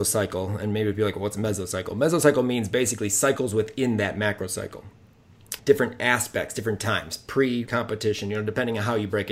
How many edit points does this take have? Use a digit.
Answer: 2